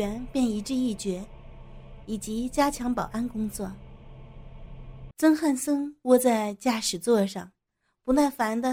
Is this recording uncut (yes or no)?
no